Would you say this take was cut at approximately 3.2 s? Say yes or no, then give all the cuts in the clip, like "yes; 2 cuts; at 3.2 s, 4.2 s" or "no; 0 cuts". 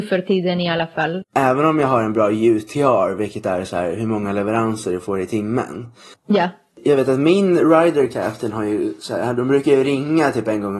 no; 2 cuts; at 1.2 s, 6.1 s